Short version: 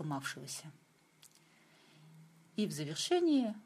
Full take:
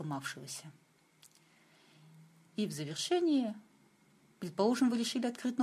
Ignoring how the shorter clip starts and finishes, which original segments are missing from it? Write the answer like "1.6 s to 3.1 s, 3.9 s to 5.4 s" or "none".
none